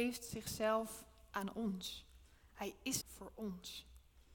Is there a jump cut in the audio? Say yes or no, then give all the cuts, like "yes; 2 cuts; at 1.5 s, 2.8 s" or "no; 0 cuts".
yes; 1 cut; at 3.0 s